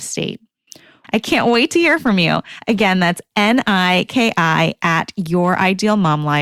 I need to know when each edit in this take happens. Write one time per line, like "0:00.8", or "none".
0:01.0
0:04.1